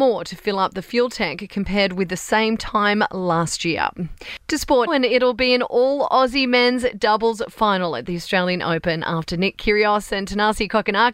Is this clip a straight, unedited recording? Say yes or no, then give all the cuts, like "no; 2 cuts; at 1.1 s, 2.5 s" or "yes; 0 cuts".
no; 1 cut; at 4.9 s